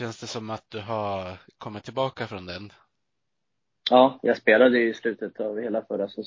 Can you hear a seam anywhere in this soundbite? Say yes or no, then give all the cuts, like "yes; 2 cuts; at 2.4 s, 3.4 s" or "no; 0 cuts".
no; 0 cuts